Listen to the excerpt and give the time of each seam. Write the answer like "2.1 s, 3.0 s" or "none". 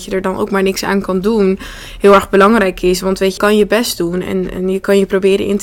3.4 s